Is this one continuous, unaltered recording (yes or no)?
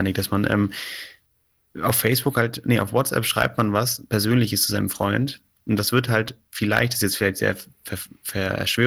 yes